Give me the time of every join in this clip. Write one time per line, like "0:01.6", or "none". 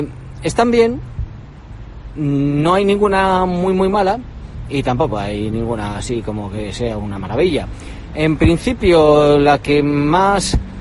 none

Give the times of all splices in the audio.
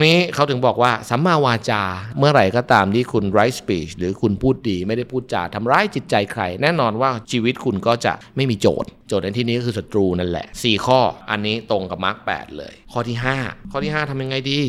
none

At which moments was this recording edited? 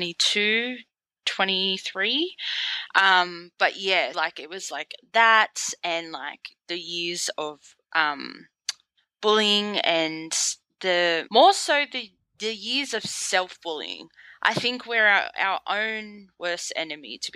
0:04.1
0:11.3

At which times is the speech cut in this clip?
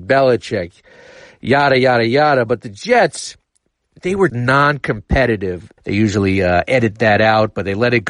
0:04.3
0:05.8

